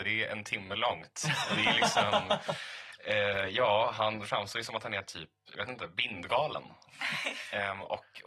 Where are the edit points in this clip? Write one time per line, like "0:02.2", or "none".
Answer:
none